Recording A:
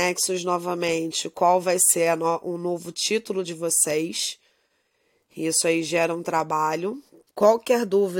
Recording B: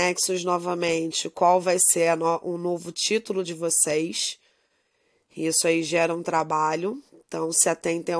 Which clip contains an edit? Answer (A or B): A